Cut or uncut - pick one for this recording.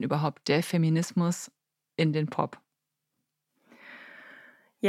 uncut